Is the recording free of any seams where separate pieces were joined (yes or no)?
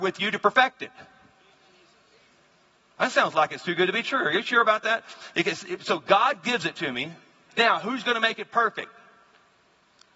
no